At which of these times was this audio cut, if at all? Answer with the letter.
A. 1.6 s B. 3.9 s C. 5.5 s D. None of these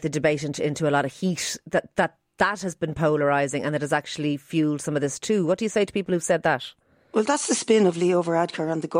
D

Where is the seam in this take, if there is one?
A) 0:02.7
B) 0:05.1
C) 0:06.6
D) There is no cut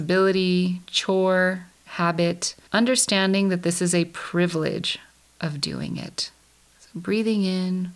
A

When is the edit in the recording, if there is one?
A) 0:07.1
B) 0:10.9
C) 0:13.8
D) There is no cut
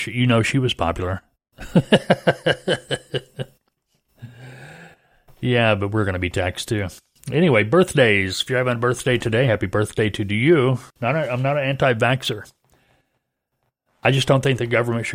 B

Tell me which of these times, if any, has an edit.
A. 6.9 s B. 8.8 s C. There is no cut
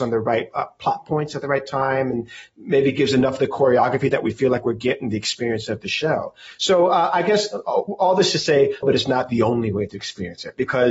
B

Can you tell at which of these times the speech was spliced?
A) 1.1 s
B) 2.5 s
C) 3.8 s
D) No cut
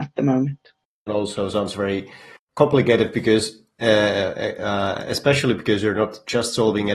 A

